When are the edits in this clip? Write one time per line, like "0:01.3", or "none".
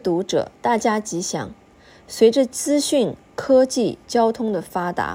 none